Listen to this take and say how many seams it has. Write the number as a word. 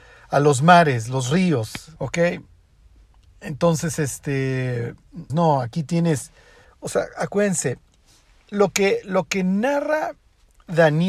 three